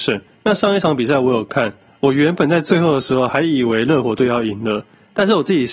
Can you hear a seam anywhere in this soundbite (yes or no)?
no